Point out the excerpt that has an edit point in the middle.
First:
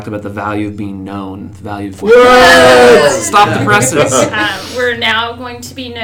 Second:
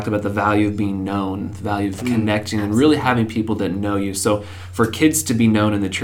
first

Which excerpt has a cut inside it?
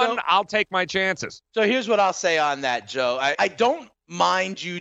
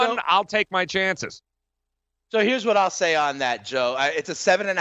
first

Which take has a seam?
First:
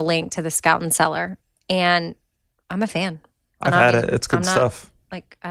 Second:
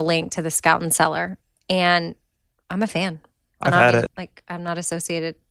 second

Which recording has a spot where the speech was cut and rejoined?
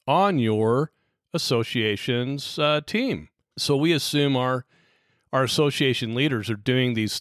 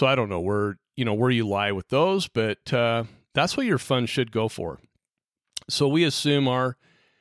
first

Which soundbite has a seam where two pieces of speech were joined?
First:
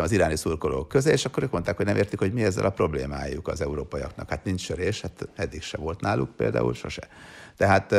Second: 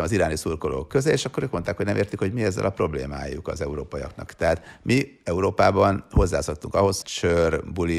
second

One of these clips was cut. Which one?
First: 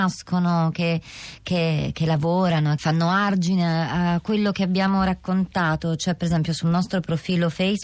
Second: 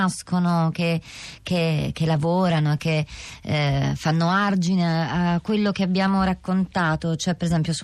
first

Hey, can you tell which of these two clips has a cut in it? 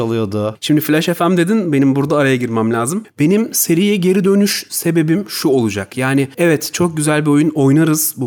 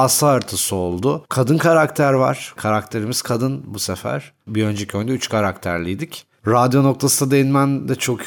second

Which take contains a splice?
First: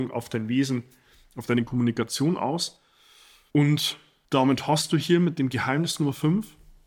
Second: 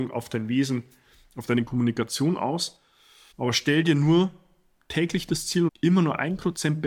second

